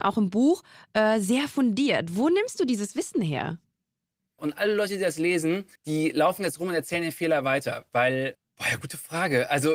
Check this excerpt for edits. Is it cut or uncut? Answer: cut